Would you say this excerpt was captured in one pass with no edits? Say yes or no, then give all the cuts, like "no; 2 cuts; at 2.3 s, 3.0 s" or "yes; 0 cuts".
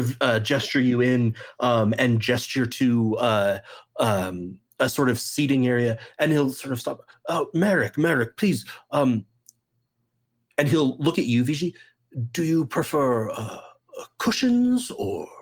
yes; 0 cuts